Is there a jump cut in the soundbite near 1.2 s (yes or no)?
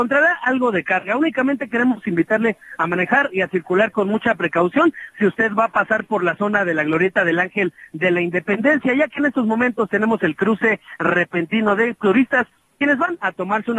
no